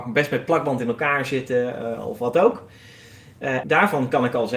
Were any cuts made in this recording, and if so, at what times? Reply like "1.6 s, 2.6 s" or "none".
3.6 s

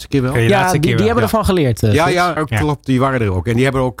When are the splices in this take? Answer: 2.4 s

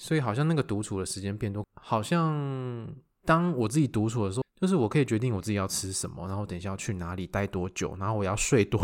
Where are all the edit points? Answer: 1.6 s, 4.4 s

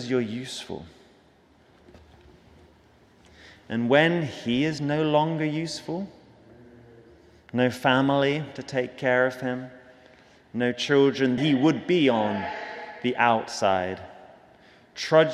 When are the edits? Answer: 11.4 s

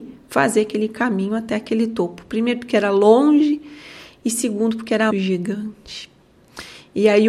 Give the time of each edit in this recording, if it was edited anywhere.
5.1 s

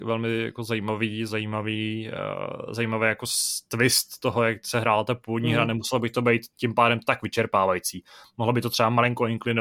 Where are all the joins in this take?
none

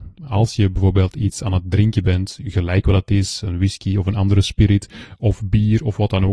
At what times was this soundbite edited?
none

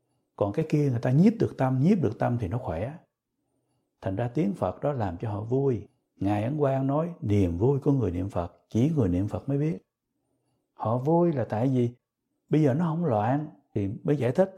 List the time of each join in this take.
none

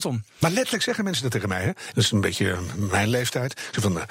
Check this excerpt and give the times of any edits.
1.9 s

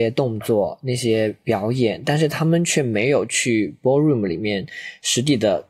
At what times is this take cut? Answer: none

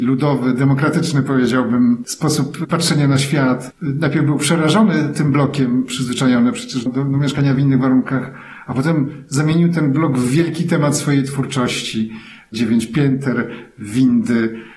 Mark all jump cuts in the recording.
6.9 s

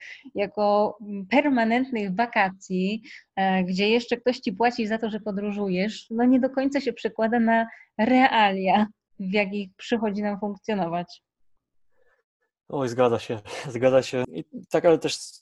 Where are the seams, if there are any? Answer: 14.2 s

